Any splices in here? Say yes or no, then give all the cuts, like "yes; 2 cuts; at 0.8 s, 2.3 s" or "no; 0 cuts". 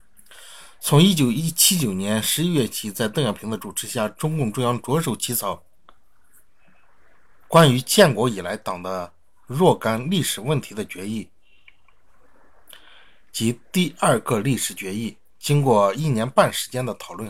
yes; 1 cut; at 12.6 s